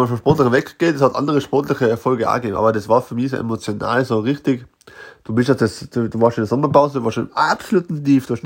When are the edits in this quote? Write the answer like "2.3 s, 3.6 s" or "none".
none